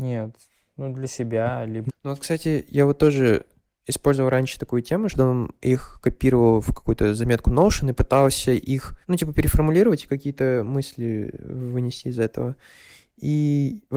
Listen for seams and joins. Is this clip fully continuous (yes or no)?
no